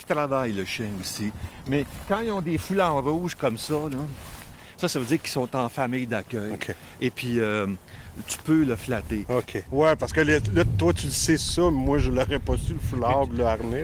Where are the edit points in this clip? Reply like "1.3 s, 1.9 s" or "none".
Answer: 9.7 s